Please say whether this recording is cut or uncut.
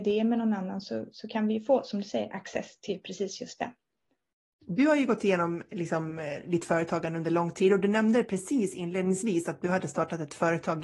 cut